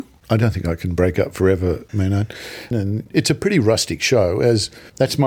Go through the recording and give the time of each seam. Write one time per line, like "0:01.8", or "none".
0:02.7

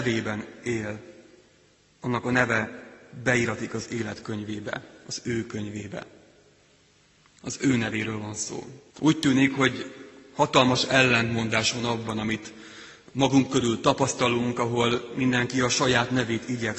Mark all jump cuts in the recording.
0:08.9

